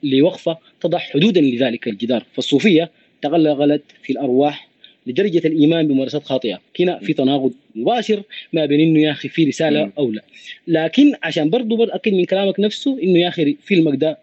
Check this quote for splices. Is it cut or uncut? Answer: cut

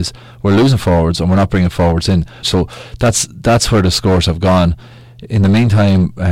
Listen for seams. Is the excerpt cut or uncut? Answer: cut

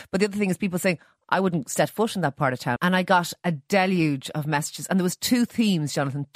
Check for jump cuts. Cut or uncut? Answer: cut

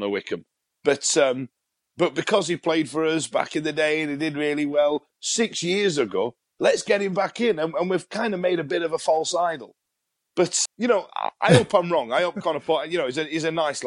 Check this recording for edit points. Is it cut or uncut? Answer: cut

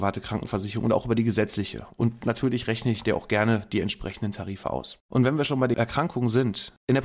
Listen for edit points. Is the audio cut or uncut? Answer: uncut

